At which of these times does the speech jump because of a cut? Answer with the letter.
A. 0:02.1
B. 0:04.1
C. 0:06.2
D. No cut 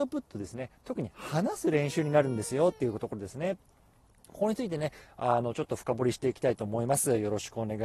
D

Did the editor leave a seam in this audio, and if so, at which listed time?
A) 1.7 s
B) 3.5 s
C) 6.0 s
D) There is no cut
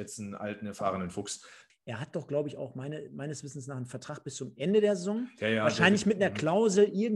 A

